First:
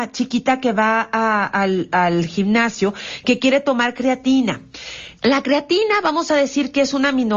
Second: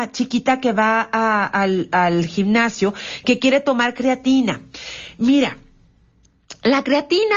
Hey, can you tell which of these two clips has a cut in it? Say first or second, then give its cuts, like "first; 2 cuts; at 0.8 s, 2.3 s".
first; 1 cut; at 5.2 s